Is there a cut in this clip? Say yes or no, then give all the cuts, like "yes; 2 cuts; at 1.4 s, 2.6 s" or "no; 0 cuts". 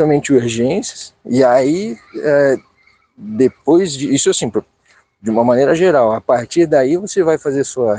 no; 0 cuts